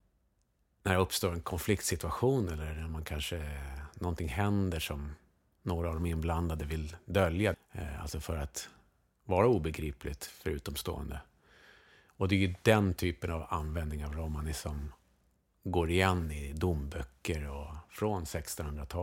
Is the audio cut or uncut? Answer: cut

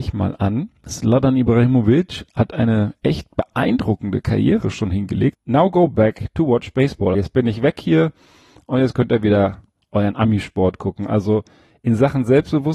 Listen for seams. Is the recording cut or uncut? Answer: cut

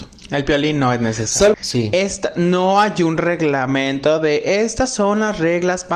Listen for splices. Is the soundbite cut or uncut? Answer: cut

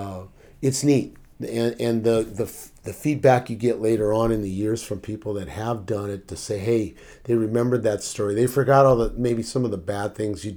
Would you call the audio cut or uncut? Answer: uncut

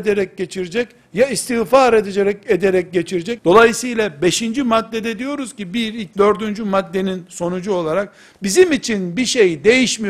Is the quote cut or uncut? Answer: cut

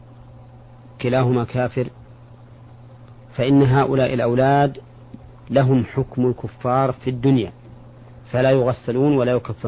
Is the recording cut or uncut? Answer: cut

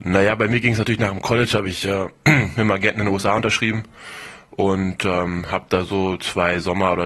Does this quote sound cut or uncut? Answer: uncut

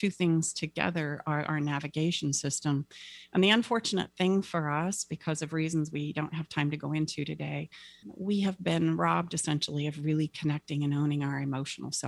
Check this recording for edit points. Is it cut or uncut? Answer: cut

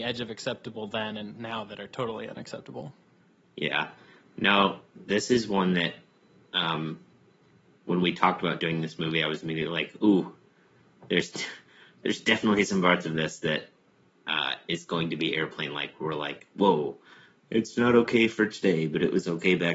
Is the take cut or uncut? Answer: uncut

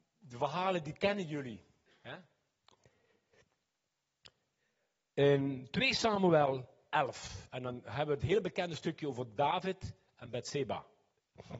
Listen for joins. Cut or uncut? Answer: uncut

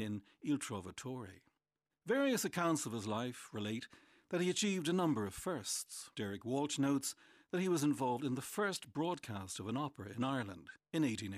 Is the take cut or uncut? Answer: cut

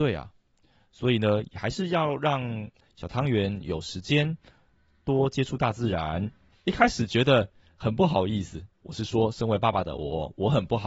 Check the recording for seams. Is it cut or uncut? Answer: cut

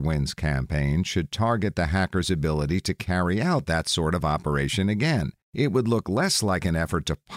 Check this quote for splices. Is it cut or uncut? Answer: cut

